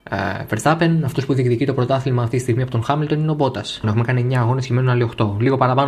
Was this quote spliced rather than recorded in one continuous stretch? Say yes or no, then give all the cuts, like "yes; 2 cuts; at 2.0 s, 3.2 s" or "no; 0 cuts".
yes; 1 cut; at 3.8 s